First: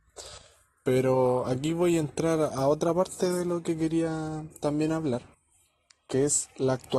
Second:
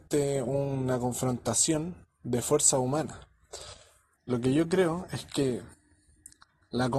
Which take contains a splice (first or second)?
second